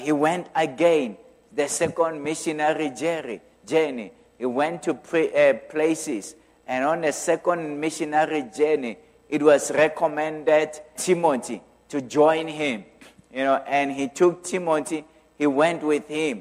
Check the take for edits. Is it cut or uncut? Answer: cut